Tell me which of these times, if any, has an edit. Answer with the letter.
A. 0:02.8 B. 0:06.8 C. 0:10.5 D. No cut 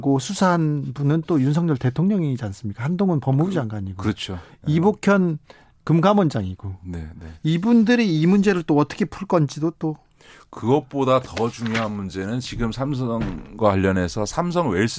D